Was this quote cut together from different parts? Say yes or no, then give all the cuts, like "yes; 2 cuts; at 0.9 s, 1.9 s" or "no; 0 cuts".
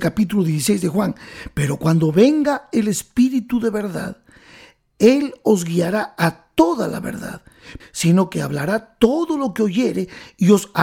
yes; 1 cut; at 7.8 s